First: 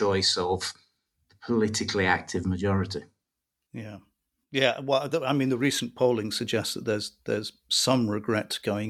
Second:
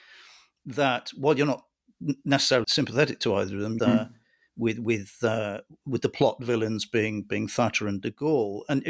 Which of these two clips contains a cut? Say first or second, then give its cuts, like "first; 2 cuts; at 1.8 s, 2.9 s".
second; 2 cuts; at 2.6 s, 3.8 s